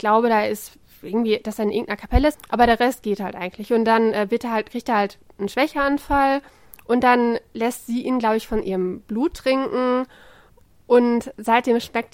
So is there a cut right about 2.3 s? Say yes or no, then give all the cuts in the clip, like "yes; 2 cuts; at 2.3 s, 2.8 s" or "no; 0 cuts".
yes; 1 cut; at 2.3 s